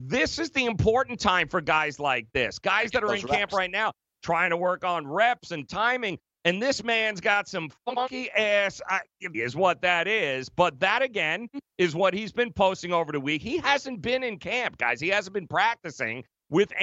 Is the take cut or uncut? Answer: cut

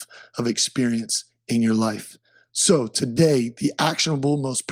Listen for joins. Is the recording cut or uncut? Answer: uncut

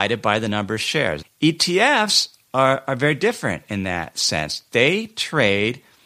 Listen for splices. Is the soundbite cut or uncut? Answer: cut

